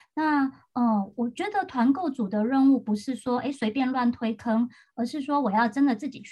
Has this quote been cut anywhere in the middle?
no; 0 cuts

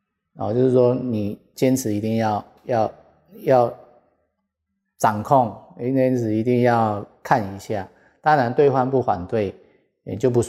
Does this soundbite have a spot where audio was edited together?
no; 0 cuts

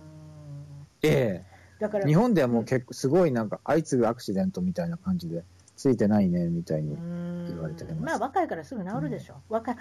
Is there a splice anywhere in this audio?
no; 0 cuts

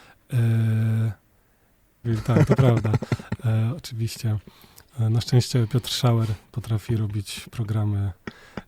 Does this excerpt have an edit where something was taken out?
yes; 1 cut; at 2.0 s

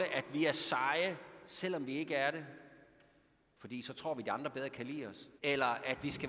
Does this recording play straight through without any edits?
no; 1 cut; at 5.4 s

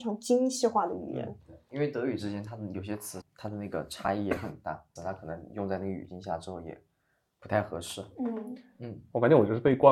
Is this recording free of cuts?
no; 2 cuts; at 3.2 s, 5.0 s

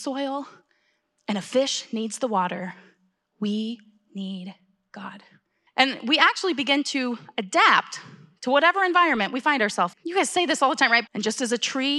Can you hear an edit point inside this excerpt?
yes; 3 cuts; at 5.7 s, 9.9 s, 11.1 s

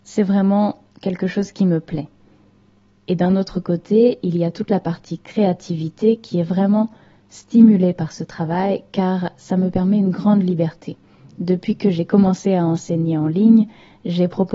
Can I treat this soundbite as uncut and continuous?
yes; 0 cuts

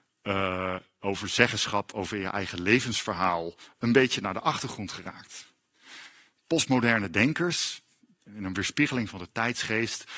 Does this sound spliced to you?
no; 0 cuts

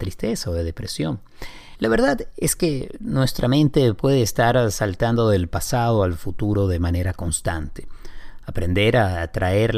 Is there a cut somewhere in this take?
no; 0 cuts

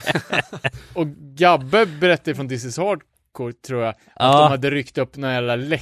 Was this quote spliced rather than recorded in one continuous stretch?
no; 0 cuts

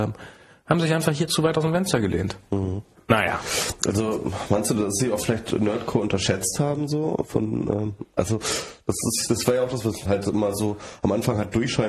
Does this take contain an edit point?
yes; 2 cuts; at 2.9 s, 10.0 s

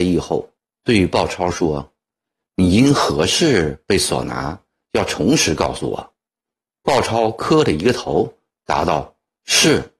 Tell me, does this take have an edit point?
no; 0 cuts

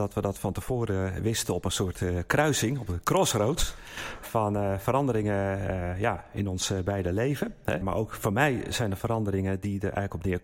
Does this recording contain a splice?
yes; 2 cuts; at 4.2 s, 7.8 s

